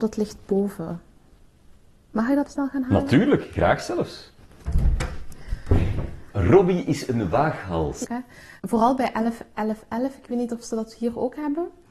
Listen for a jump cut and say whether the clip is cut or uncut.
cut